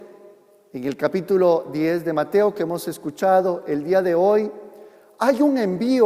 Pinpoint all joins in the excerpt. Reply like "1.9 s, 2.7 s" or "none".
none